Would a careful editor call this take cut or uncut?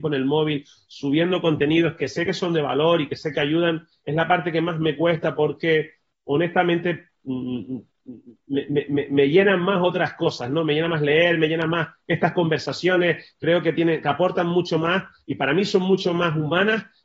uncut